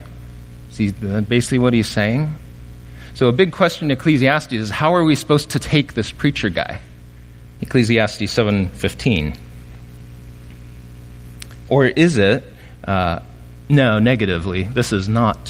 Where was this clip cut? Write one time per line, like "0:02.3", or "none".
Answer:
0:07.6
0:11.7

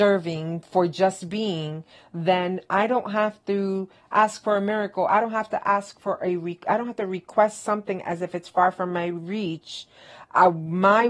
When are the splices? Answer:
none

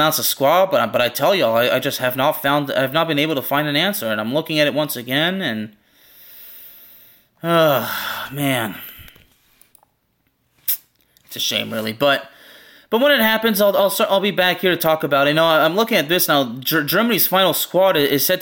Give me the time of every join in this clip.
none

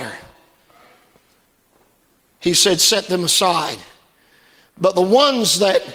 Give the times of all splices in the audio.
none

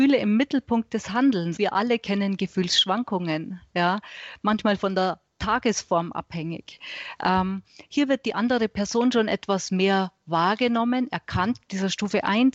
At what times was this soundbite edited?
0:01.6
0:11.6

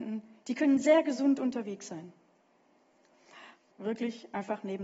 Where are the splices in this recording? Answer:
0:03.7

